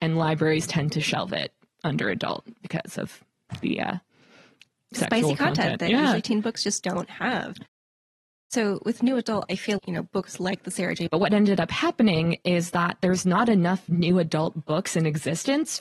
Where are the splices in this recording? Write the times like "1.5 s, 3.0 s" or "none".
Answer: 9.8 s, 11.1 s